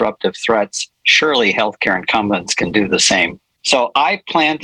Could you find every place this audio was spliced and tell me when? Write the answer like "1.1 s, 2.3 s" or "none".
3.6 s